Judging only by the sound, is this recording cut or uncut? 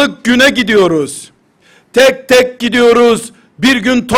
uncut